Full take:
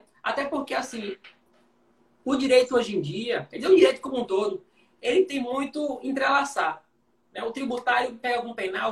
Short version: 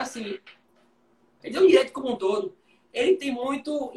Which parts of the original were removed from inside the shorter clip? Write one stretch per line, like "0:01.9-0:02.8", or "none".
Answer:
0:02.2-0:03.5